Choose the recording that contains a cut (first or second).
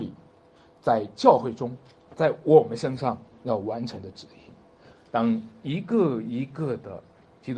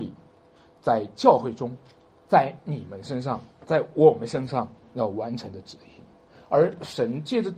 first